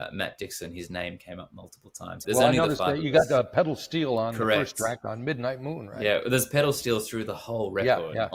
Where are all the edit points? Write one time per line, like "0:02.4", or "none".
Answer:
0:02.2